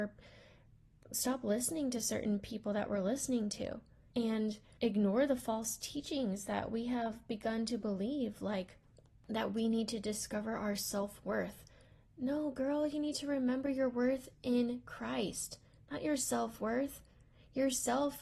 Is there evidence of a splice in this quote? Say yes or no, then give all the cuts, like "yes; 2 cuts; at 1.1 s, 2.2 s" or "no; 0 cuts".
no; 0 cuts